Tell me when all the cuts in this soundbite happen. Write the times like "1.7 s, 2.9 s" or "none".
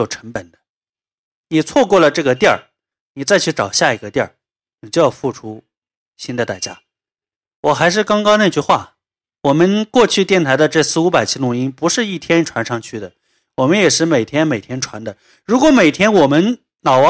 none